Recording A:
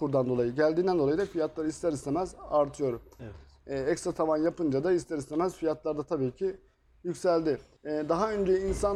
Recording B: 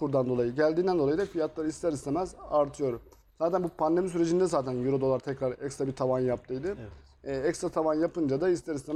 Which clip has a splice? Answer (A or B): A